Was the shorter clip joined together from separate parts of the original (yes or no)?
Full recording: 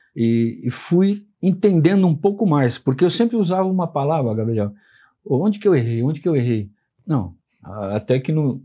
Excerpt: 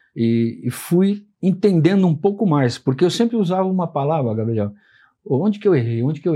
no